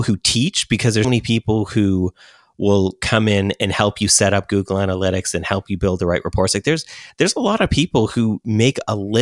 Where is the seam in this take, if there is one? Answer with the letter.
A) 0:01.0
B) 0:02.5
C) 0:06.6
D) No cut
A